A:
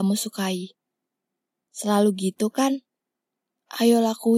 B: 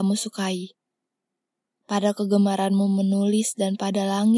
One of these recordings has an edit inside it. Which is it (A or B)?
A